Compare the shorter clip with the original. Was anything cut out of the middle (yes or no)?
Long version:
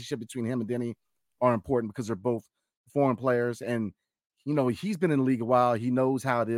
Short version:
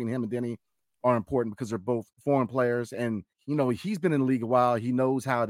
yes